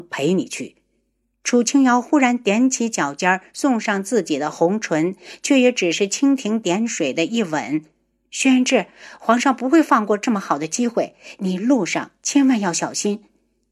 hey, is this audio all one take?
yes; 0 cuts

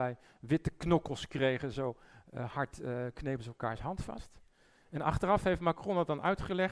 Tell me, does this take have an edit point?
no; 0 cuts

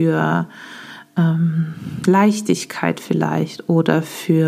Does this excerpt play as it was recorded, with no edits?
yes; 0 cuts

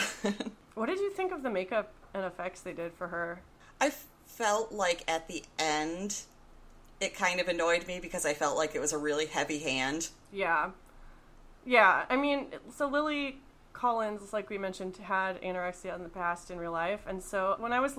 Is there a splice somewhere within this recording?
no; 0 cuts

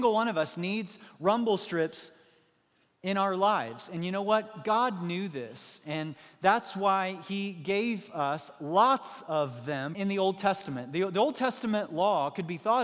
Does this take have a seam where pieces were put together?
yes; 1 cut; at 9.9 s

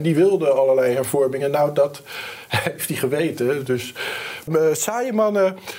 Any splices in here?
yes; 1 cut; at 4.5 s

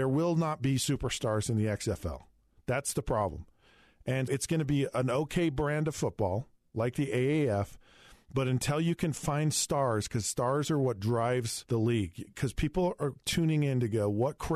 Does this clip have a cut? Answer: yes; 2 cuts; at 4.3 s, 11.7 s

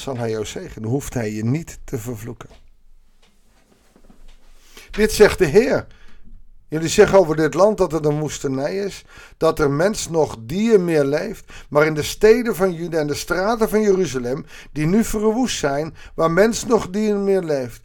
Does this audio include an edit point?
no; 0 cuts

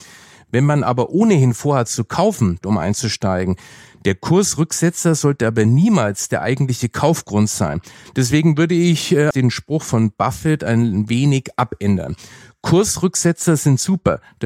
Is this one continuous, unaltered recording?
no; 2 cuts; at 2.6 s, 9.3 s

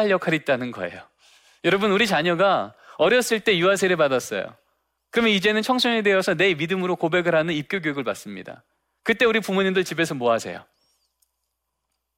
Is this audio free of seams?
yes; 0 cuts

